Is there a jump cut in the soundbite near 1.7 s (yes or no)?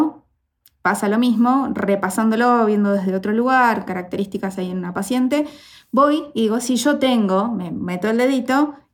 no